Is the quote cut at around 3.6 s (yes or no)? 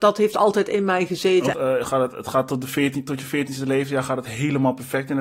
no